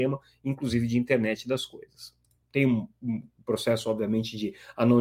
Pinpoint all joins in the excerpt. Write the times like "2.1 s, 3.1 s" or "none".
2.4 s

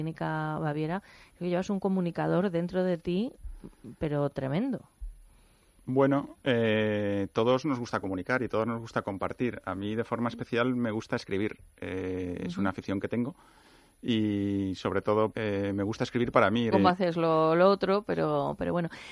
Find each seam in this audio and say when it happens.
15.3 s, 16.7 s

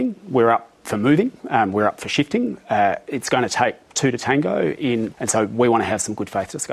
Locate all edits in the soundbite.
5.1 s

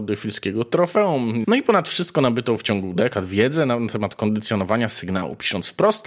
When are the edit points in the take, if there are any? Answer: 1.4 s

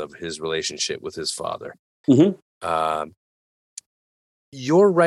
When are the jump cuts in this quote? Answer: 2.0 s

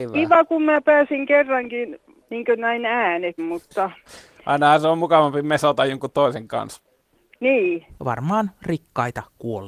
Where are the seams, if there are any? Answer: 3.4 s, 8.0 s

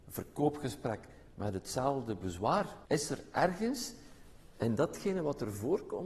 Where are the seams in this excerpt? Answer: 2.9 s

